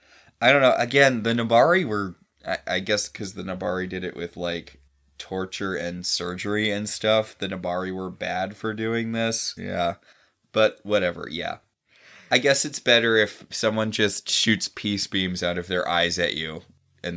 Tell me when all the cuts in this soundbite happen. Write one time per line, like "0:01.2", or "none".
0:09.6